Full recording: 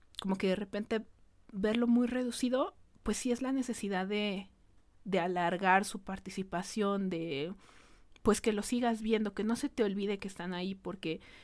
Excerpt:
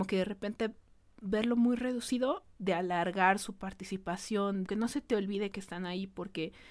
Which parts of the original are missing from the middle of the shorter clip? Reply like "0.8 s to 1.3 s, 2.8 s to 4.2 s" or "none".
2.9 s to 5.0 s, 7.1 s to 9.3 s